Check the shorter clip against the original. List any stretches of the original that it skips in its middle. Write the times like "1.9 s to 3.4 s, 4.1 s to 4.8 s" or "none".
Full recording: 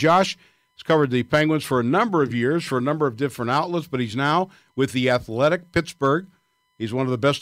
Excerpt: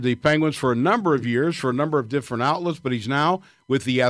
none